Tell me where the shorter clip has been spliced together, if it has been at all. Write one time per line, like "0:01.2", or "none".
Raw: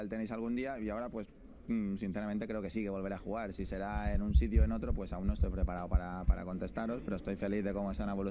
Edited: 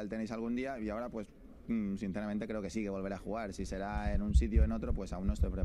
none